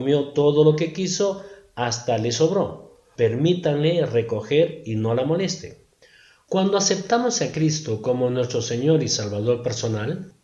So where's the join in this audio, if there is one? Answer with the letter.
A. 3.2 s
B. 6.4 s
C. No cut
A